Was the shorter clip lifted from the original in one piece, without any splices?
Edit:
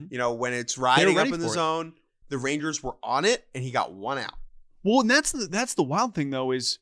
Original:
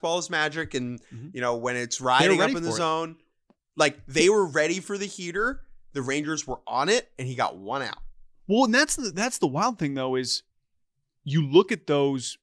no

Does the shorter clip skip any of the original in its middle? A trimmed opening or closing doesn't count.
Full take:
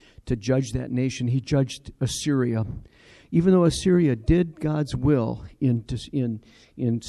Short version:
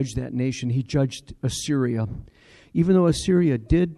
no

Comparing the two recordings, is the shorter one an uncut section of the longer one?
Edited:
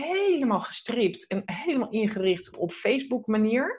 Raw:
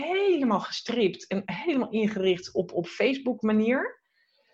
no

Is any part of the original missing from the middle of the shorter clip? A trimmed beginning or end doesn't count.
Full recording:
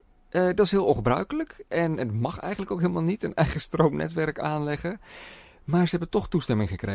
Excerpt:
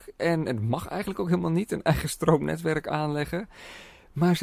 no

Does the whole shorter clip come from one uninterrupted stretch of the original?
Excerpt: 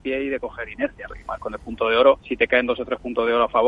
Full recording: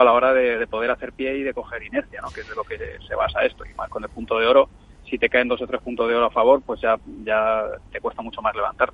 no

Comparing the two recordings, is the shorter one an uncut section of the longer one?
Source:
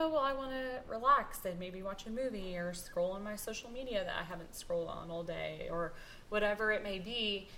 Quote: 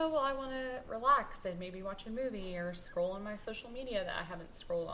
yes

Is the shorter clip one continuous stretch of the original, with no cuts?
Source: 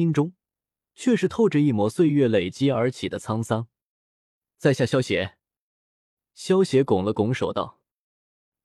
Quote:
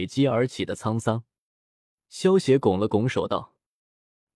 no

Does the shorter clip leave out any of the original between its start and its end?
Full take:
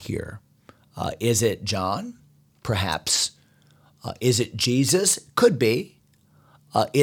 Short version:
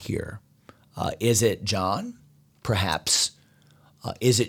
no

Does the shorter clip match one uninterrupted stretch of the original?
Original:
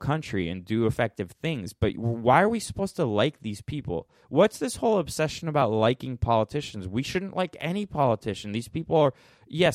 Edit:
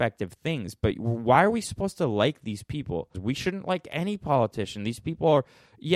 no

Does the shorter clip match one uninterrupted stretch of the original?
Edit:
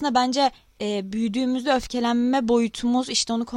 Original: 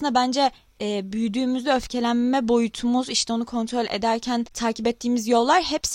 yes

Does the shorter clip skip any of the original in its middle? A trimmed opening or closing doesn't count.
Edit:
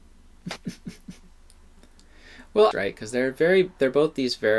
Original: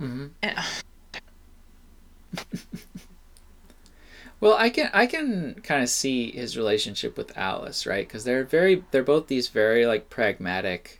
yes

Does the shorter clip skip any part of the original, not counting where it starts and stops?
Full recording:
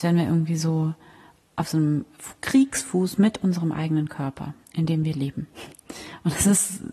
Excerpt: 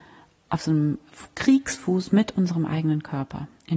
no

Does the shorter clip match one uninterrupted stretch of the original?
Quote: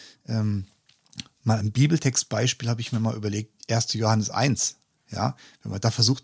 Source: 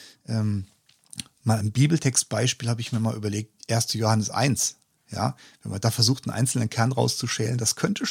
yes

